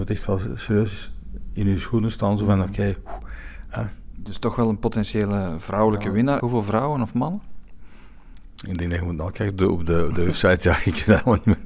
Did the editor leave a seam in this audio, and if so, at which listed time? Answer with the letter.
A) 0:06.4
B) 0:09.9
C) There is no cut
A